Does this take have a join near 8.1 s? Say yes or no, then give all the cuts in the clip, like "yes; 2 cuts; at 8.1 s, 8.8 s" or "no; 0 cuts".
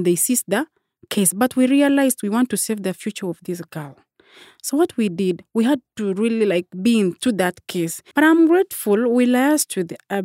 yes; 1 cut; at 8.1 s